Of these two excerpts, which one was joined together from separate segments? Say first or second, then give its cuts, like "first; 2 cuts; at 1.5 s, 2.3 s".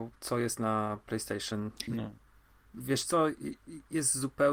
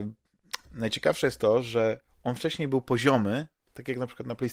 first; 1 cut; at 1.9 s